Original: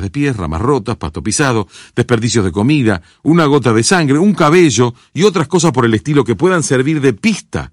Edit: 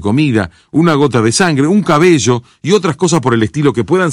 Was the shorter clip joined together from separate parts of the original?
no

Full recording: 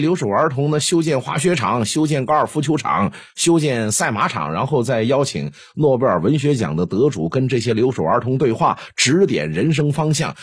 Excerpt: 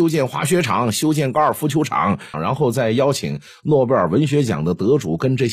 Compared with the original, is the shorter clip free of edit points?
no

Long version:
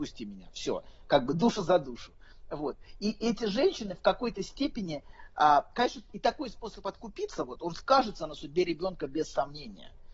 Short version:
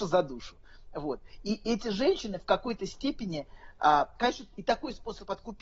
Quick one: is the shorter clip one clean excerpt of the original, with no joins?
yes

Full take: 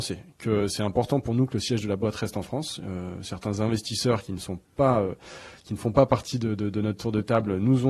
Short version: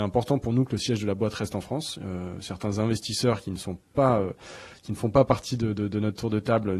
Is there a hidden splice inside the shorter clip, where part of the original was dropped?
no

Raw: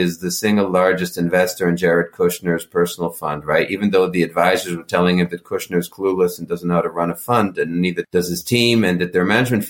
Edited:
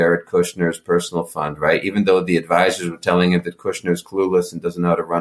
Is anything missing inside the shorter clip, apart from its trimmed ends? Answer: no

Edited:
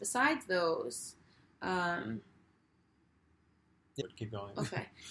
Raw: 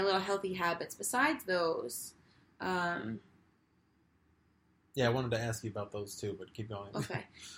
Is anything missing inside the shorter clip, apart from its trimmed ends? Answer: yes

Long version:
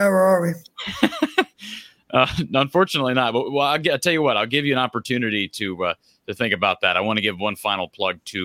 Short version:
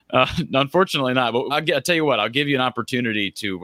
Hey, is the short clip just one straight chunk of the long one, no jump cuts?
no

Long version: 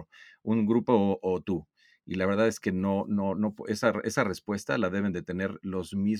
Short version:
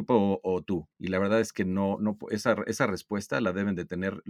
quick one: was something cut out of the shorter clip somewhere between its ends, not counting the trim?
yes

